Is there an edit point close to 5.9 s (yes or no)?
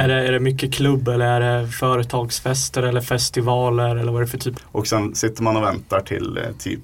no